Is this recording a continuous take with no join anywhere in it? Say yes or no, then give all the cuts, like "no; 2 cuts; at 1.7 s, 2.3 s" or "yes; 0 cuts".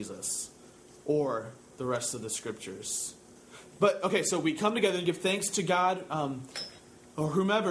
yes; 0 cuts